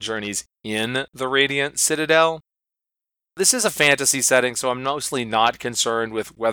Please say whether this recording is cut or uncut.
uncut